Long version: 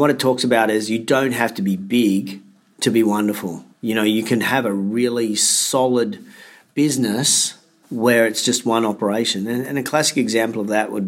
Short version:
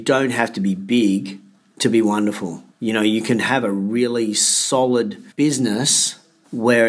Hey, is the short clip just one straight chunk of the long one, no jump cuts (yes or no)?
no